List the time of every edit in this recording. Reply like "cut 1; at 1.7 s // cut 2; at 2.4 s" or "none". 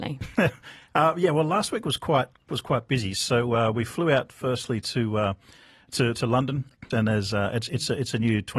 cut 1; at 6.9 s